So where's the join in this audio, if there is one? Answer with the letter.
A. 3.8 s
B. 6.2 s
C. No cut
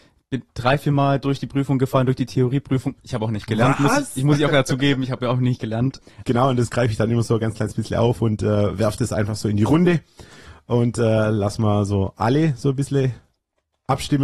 B